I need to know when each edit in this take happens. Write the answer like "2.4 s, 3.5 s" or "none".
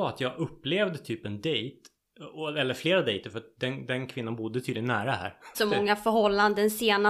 5.5 s